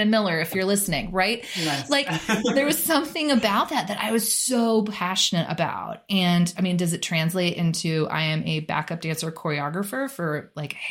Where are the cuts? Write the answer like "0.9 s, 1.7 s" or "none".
none